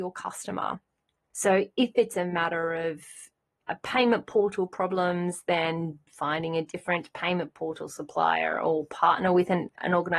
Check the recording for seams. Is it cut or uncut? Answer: cut